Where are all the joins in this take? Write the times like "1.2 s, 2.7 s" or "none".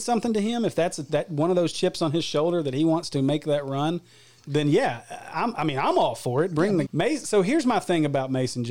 4.4 s, 6.9 s